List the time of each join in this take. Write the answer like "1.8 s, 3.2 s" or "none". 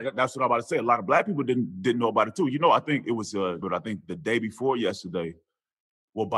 3.6 s